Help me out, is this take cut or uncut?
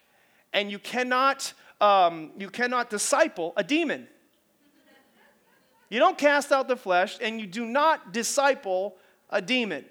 uncut